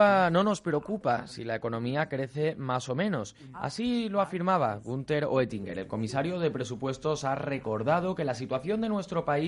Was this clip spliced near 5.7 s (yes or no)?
no